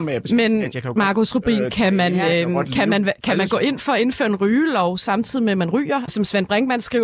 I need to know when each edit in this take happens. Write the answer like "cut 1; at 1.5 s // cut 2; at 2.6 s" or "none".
cut 1; at 6.1 s